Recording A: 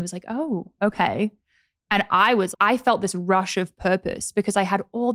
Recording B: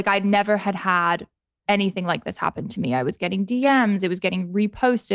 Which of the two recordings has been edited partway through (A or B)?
A